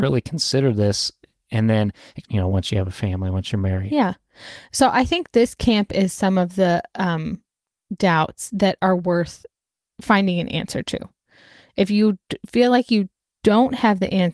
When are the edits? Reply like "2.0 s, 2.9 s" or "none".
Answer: 2.2 s